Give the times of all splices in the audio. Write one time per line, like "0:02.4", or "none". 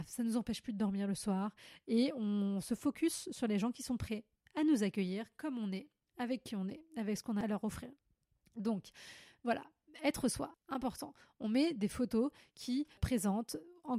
0:10.5
0:13.0